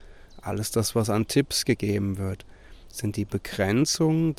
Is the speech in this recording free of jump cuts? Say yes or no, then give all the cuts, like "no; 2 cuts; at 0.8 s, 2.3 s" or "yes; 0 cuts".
yes; 0 cuts